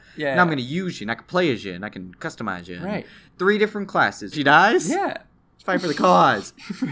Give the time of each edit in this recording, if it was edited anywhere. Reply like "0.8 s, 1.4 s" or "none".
4.3 s